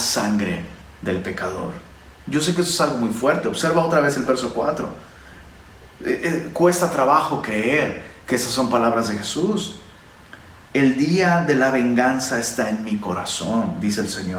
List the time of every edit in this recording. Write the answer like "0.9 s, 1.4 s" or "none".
none